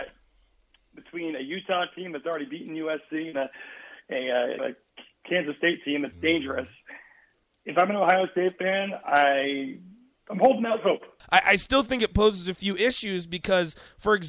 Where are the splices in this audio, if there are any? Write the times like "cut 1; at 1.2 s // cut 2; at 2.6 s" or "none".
cut 1; at 4.6 s // cut 2; at 11.2 s